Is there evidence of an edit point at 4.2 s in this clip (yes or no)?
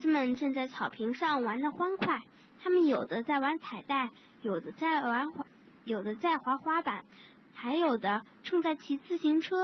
no